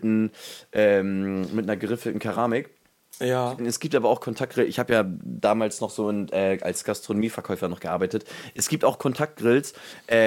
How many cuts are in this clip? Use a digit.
1